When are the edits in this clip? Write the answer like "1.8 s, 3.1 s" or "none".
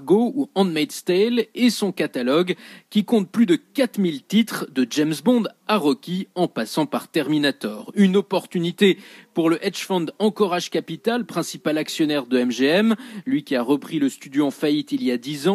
none